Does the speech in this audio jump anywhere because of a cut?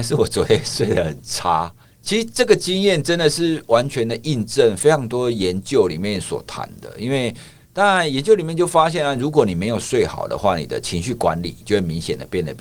no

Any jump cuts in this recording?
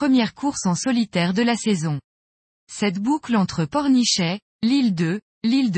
no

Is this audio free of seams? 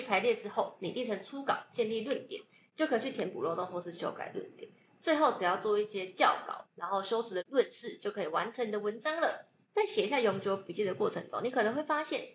yes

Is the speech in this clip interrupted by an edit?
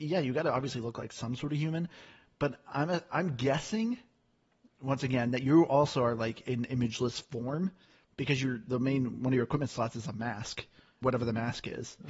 yes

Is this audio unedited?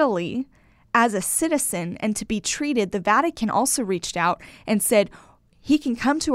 yes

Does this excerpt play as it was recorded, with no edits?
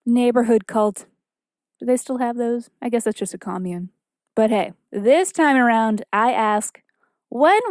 yes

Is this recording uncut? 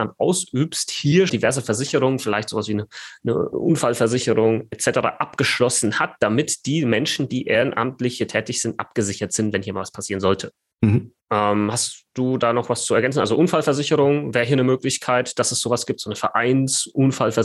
no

